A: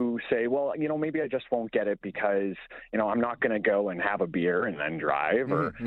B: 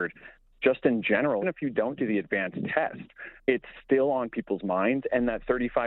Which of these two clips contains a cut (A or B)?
B